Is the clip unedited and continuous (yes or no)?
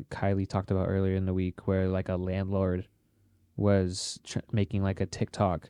yes